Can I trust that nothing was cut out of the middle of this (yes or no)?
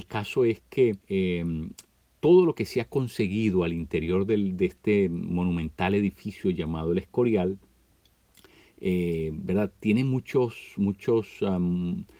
no